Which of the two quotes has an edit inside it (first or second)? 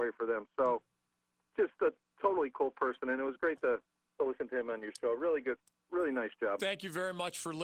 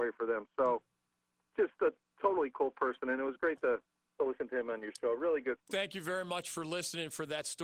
second